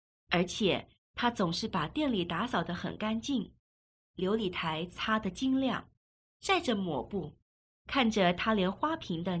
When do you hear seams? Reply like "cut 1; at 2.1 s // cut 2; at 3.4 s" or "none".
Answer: cut 1; at 7.8 s